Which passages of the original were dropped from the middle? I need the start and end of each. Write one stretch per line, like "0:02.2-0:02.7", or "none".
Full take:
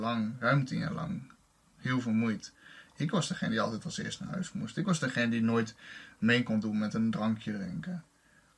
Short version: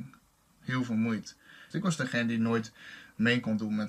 0:02.9-0:04.7